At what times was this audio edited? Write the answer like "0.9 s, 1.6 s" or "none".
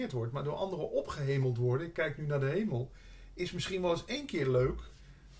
none